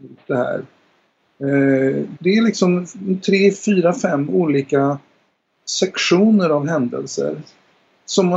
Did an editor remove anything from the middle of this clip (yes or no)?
yes